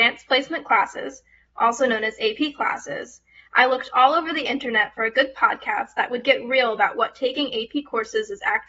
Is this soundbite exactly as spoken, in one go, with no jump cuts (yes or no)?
yes